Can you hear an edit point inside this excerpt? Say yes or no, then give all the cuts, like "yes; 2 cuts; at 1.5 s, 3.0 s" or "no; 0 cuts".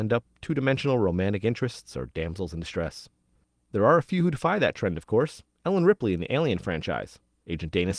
no; 0 cuts